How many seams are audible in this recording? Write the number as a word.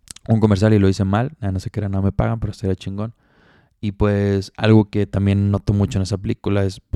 zero